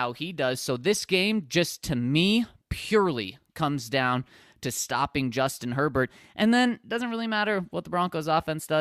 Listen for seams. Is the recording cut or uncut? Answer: uncut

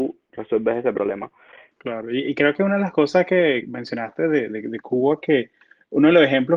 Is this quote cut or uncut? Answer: cut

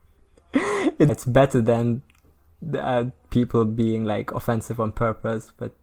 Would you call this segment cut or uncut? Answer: cut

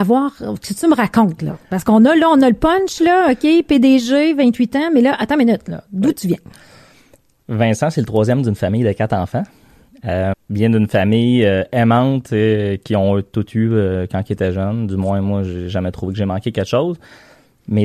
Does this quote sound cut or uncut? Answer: cut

